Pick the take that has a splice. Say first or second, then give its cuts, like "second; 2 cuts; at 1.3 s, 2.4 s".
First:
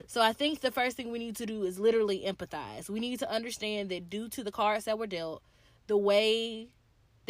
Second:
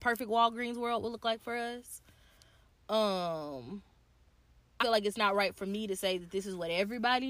second; 1 cut; at 4.8 s